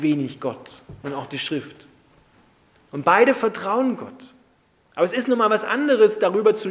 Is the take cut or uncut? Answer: uncut